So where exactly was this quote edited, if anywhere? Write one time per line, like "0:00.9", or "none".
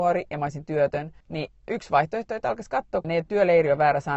0:01.2
0:03.0